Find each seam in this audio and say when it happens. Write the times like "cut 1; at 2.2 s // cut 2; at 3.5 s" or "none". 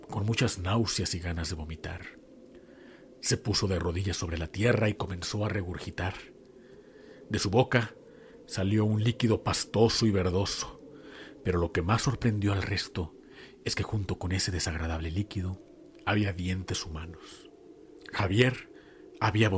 none